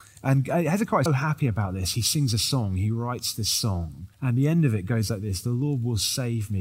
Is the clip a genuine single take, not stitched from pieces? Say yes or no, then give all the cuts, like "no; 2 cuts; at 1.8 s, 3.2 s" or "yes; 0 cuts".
no; 2 cuts; at 1.1 s, 4.1 s